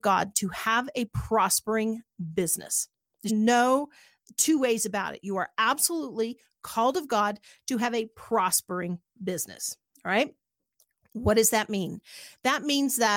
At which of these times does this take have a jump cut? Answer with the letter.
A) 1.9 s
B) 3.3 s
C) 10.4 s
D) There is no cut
B